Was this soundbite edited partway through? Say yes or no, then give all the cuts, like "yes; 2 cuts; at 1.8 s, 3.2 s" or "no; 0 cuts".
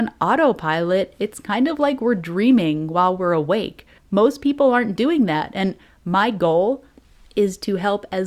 yes; 1 cut; at 4.0 s